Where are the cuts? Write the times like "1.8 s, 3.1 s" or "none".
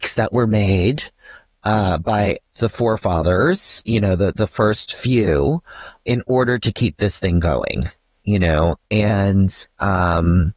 2.6 s, 6.1 s